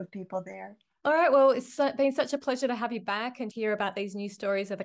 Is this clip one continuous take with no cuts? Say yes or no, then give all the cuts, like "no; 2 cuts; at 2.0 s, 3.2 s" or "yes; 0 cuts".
no; 2 cuts; at 1.0 s, 3.5 s